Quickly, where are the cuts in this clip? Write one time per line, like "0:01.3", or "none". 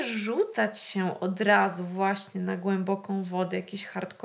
none